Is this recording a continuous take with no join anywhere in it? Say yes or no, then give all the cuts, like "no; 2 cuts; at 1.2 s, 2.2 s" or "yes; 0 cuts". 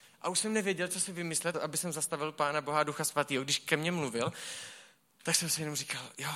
no; 1 cut; at 1.5 s